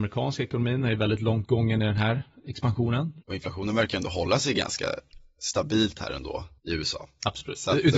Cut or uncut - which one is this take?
cut